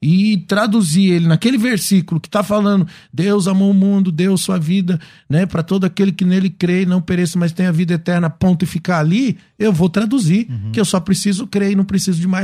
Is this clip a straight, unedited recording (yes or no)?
yes